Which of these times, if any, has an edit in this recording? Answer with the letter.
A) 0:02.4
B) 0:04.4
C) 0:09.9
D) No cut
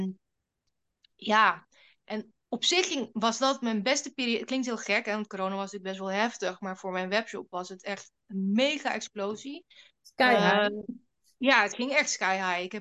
A